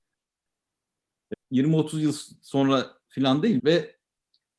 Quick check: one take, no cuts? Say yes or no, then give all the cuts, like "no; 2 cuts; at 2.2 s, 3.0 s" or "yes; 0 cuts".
no; 2 cuts; at 1.3 s, 3.6 s